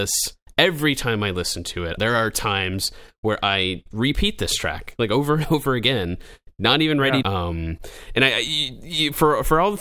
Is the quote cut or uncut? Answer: cut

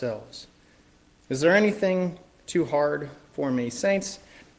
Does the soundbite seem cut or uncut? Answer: uncut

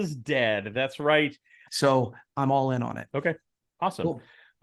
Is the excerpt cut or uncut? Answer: cut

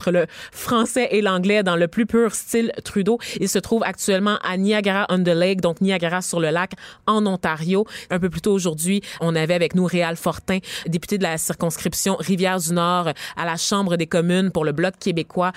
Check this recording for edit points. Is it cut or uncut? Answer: cut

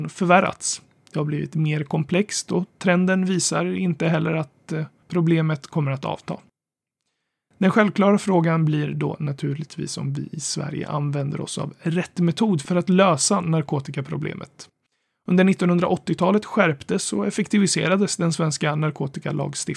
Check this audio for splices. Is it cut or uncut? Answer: uncut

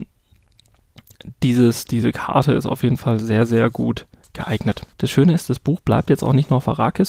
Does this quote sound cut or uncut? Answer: cut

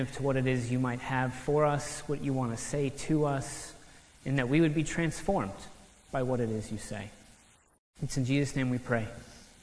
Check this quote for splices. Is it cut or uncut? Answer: uncut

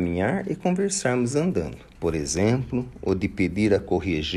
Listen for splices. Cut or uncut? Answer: cut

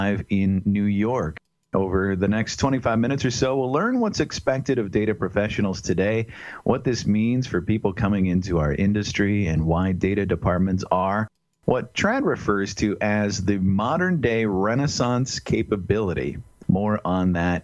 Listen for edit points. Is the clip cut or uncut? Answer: uncut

